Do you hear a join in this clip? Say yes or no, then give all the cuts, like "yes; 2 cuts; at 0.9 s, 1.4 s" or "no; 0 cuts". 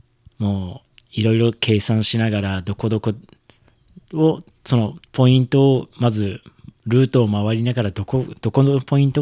yes; 2 cuts; at 5.1 s, 6.8 s